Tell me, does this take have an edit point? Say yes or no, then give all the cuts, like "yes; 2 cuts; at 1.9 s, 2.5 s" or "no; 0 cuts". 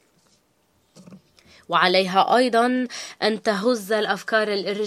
no; 0 cuts